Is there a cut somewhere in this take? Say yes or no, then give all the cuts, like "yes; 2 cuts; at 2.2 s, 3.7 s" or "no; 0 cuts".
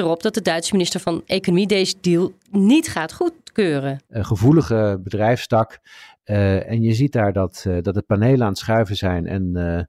yes; 1 cut; at 4.1 s